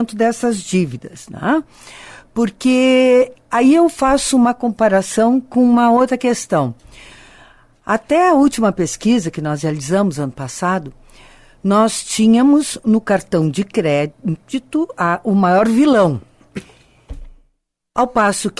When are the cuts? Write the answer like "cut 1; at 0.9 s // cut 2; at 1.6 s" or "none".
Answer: none